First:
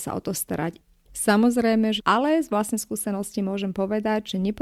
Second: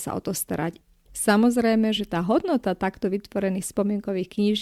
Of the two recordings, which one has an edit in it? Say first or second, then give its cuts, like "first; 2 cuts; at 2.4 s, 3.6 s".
first; 1 cut; at 2.0 s